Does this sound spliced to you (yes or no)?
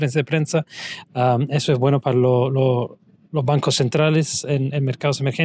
yes